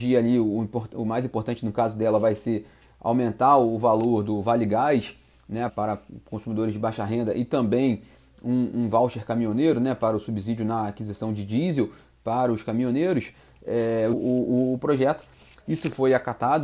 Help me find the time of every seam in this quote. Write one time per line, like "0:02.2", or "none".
0:05.7
0:14.1